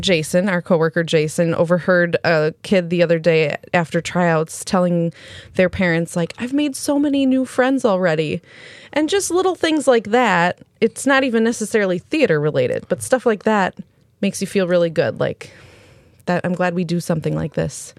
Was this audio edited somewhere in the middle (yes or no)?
no